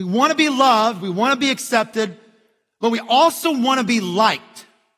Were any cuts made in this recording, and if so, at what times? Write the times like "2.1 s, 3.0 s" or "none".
none